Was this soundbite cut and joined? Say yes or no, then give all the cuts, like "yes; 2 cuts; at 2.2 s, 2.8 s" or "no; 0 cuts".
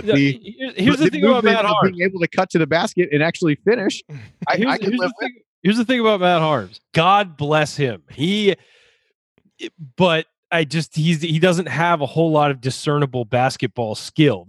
yes; 1 cut; at 6.9 s